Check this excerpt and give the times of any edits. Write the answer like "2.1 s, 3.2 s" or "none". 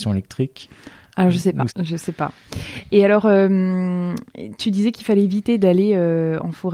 1.7 s

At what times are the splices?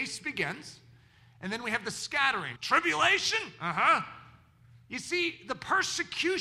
2.6 s

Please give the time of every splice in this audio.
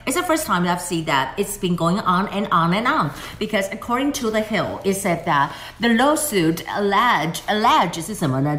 none

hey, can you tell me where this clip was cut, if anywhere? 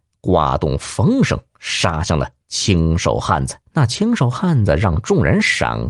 3.7 s

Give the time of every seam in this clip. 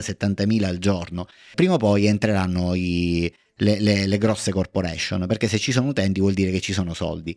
1.5 s

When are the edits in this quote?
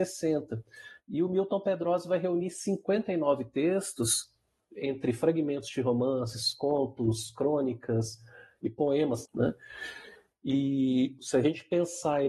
9.3 s, 11.2 s

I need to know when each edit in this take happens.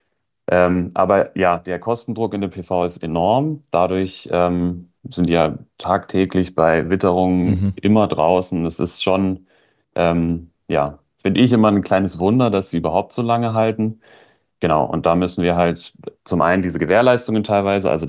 5.0 s

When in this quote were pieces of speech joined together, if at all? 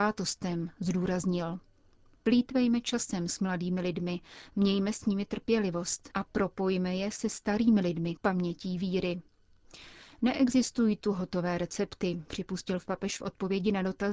6.1 s, 8.2 s

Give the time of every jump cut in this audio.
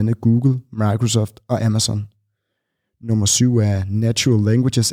none

